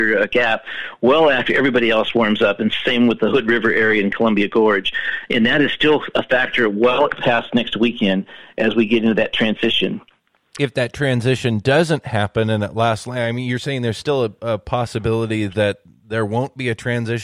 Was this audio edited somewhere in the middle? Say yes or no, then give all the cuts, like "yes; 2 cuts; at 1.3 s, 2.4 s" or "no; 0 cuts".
no; 0 cuts